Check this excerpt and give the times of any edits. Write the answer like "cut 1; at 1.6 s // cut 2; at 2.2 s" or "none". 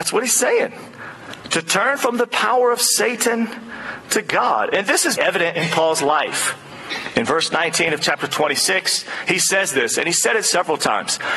cut 1; at 5.2 s

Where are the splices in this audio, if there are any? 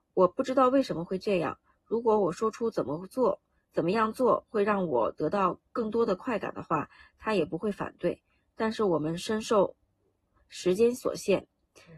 none

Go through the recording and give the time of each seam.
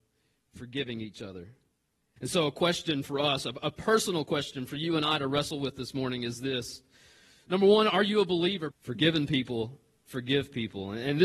cut 1; at 2.2 s // cut 2; at 8.7 s

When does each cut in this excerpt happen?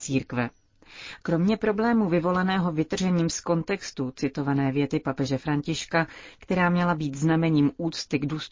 cut 1; at 1.2 s

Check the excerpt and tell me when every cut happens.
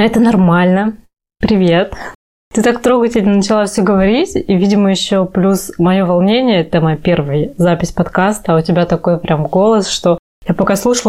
cut 1; at 1.3 s

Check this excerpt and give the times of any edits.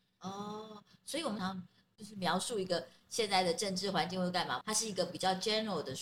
cut 1; at 1.4 s // cut 2; at 4.6 s

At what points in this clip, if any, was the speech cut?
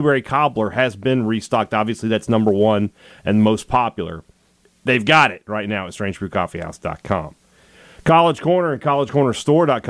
none

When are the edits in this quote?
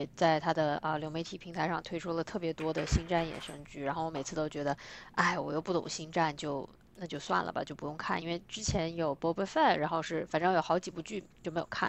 none

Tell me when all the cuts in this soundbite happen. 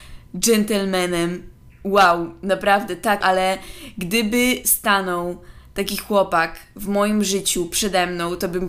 cut 1; at 3.2 s

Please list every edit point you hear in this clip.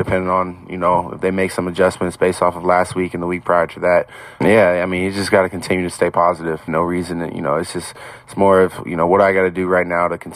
cut 1; at 4.4 s // cut 2; at 6.7 s

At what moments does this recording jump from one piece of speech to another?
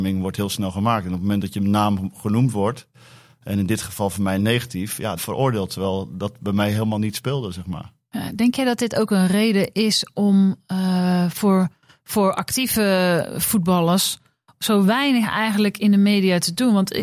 cut 1; at 5.2 s

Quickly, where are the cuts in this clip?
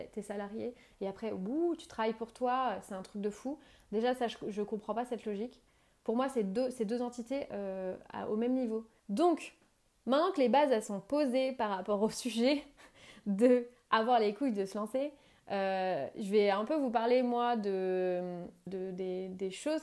cut 1; at 9.0 s // cut 2; at 18.7 s

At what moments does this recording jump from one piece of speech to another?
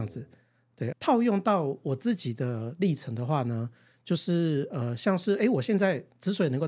cut 1; at 0.9 s

